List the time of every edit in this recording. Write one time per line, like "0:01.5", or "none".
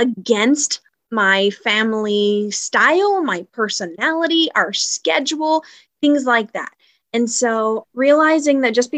0:07.8